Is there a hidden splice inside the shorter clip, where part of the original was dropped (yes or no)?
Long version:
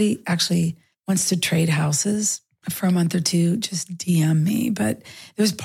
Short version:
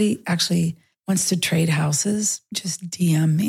yes